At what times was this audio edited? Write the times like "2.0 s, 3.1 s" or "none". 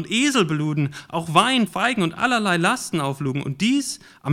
1.7 s

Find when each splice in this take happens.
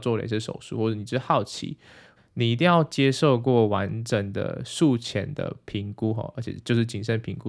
2.2 s

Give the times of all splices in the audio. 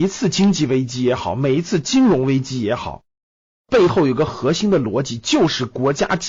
none

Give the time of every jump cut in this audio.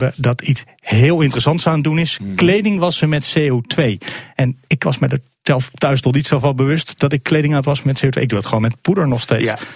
7.6 s

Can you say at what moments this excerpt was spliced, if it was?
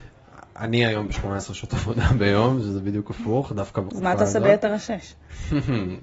3.9 s

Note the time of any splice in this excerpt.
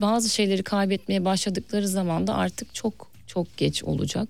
none

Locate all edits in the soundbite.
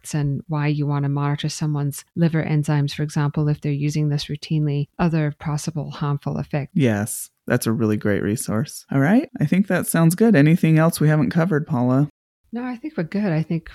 6.7 s

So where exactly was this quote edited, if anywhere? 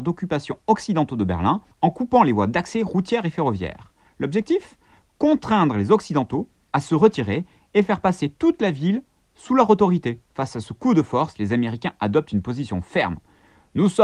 1.7 s, 10.2 s

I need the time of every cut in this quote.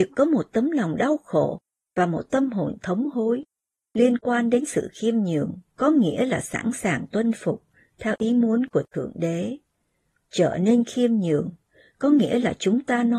5.7 s

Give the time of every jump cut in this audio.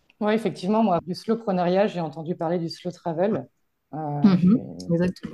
1.0 s

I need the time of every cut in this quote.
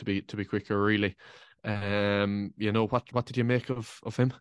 none

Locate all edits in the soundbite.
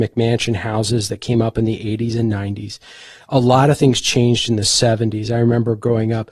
none

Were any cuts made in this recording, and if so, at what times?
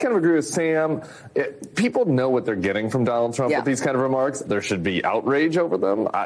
4.4 s

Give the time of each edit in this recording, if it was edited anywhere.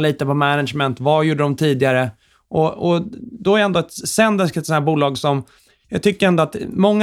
none

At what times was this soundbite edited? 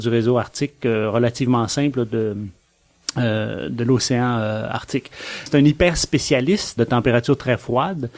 5.5 s, 6.8 s

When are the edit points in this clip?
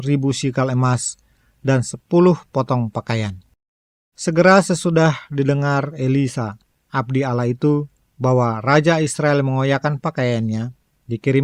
4.1 s

